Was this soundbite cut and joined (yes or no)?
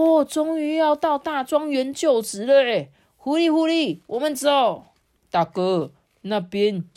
no